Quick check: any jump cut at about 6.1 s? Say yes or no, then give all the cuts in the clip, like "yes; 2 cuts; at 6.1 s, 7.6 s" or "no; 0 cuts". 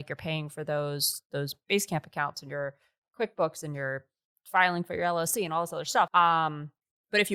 yes; 1 cut; at 6.1 s